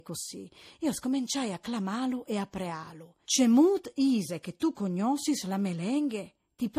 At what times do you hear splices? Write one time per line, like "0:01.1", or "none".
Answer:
0:03.2

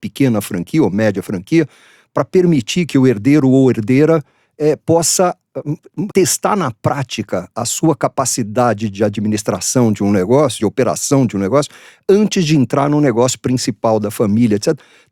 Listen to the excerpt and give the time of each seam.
0:06.1
0:10.6

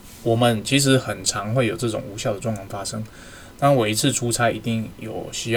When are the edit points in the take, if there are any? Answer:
none

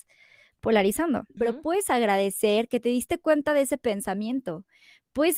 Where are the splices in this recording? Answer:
0:01.4

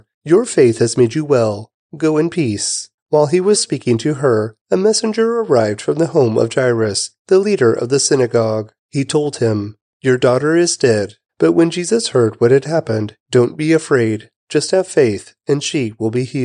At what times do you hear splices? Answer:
0:03.5
0:11.3
0:13.2

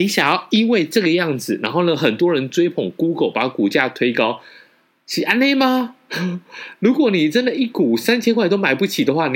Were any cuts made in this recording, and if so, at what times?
none

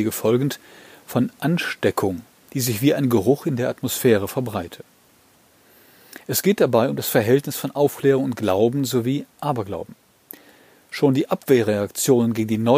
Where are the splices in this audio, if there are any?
0:02.5

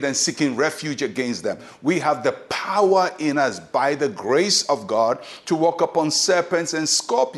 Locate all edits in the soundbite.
none

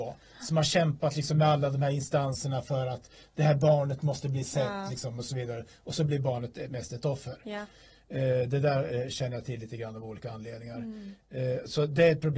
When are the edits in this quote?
0:06.7

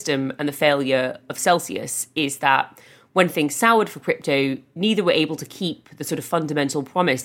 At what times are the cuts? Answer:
none

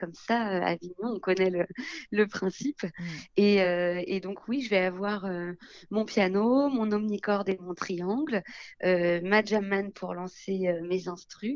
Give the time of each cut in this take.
none

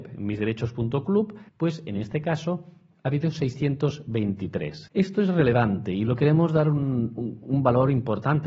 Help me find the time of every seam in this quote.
0:01.5
0:04.9

